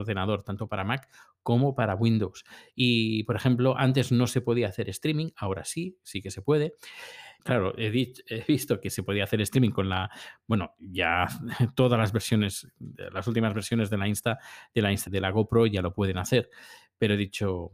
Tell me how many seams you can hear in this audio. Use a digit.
2